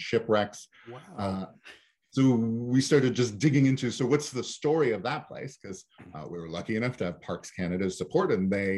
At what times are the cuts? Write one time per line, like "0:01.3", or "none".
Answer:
none